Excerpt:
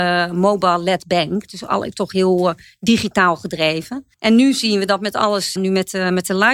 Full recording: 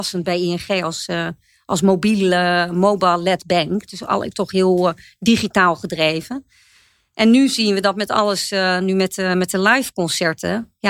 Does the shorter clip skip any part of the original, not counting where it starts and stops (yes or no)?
yes